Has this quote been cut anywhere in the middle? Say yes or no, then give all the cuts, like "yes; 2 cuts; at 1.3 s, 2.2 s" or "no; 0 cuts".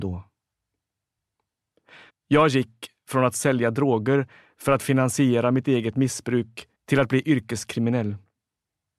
yes; 2 cuts; at 2.1 s, 6.7 s